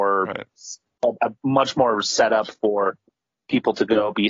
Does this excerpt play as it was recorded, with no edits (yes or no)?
no